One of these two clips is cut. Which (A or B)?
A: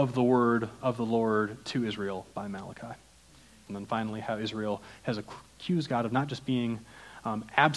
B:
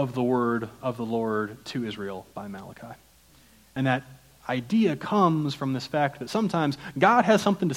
A